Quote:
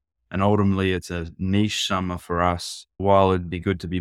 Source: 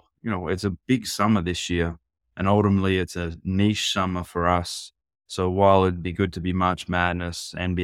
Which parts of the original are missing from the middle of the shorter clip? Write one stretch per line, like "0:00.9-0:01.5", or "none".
0:05.1-0:05.5